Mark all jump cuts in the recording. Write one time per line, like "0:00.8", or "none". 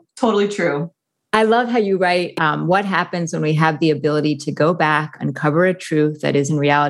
none